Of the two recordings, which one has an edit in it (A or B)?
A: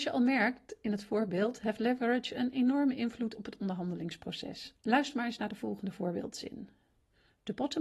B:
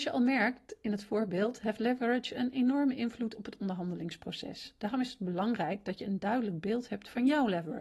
A